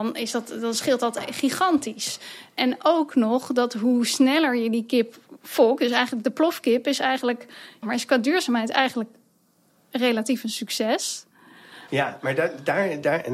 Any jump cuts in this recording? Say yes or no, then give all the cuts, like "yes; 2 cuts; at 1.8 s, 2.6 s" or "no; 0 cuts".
yes; 2 cuts; at 7.8 s, 11.9 s